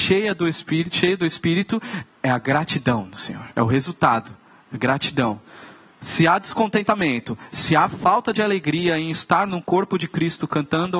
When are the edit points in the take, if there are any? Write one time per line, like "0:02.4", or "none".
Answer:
0:02.1
0:03.5